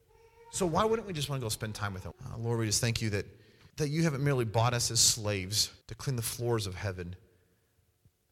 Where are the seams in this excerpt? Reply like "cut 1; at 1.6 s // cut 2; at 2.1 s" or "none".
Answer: cut 1; at 2.1 s // cut 2; at 3.7 s // cut 3; at 5.8 s